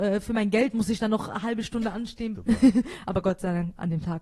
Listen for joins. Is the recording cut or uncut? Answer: cut